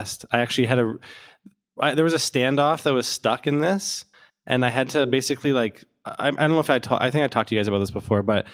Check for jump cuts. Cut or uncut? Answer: uncut